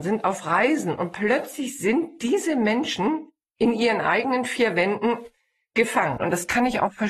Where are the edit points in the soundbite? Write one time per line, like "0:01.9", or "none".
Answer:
0:06.2